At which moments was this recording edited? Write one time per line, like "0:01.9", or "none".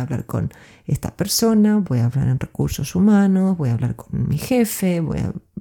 none

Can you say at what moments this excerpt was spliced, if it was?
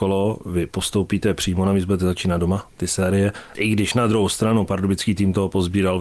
0:03.5

